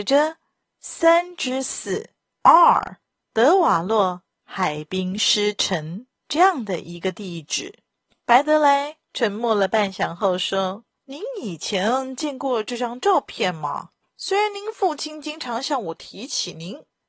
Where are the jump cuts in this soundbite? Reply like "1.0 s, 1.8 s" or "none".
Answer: 14.0 s

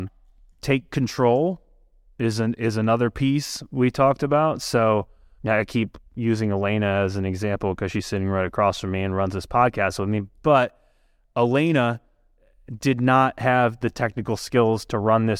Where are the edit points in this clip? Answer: 5.4 s

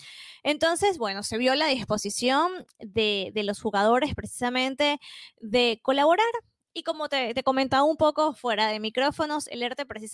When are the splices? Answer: none

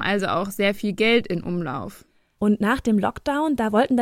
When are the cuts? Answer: 2.4 s

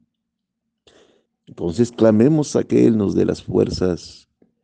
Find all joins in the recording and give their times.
1.3 s

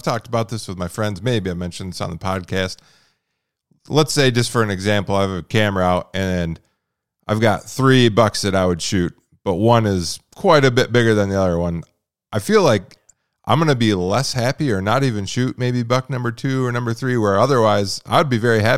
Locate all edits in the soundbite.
none

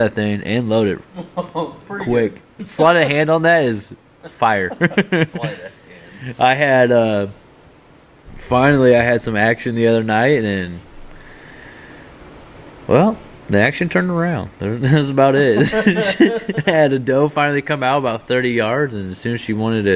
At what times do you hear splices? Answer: none

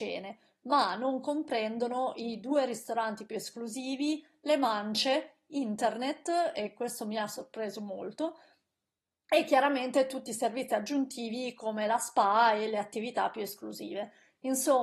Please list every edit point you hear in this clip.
none

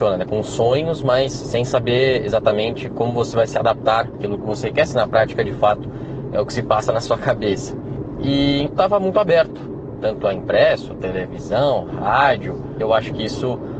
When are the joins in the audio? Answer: 8.7 s

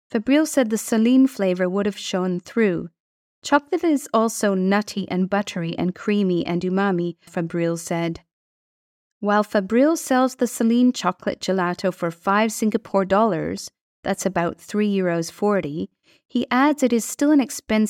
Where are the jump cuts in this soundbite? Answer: 7.3 s

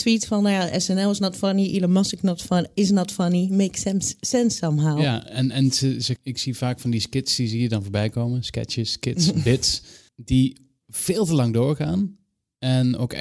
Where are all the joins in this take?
6.2 s, 10.1 s

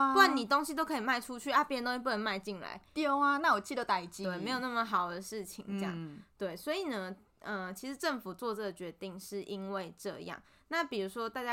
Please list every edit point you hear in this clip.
none

